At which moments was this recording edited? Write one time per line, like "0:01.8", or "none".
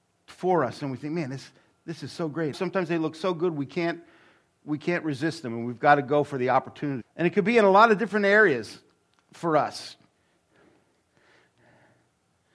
0:02.5
0:07.0